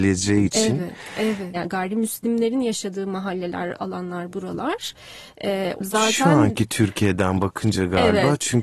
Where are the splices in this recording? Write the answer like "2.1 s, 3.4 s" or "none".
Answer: 1.5 s, 5.8 s

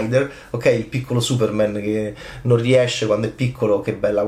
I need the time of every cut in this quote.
none

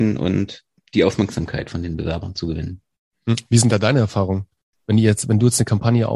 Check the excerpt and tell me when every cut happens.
4.7 s

